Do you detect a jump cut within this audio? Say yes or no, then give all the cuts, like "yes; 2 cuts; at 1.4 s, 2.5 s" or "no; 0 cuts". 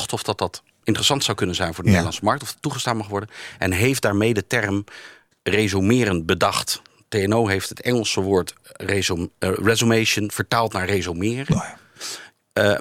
no; 0 cuts